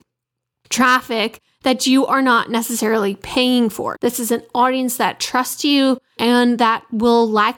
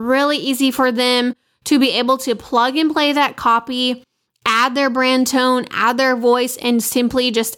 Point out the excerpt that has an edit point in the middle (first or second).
first